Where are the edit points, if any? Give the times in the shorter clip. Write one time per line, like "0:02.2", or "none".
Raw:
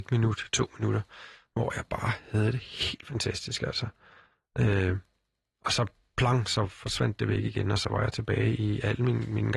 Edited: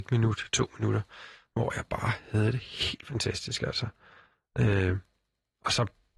none